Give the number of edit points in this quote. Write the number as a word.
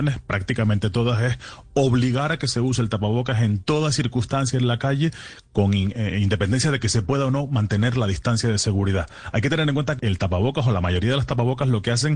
one